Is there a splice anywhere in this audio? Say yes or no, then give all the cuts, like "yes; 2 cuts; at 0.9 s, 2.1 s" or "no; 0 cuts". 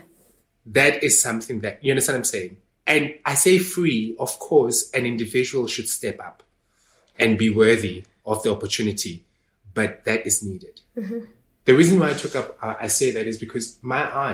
no; 0 cuts